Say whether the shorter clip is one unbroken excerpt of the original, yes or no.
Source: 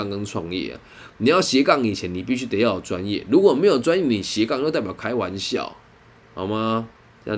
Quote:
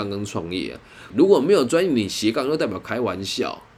no